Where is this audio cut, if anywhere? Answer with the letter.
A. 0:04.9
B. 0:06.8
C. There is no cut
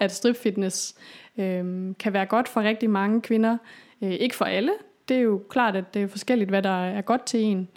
C